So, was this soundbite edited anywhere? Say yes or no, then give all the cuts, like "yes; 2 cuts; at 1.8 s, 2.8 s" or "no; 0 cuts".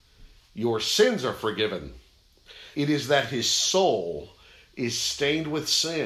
yes; 1 cut; at 2.7 s